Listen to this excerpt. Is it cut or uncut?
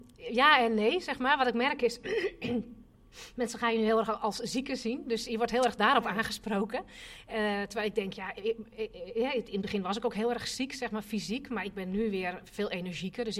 uncut